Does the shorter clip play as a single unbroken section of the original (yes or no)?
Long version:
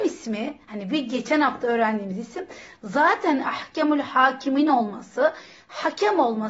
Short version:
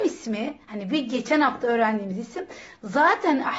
yes